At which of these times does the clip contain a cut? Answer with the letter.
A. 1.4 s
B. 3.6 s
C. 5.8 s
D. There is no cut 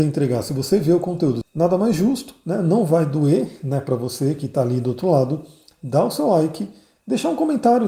A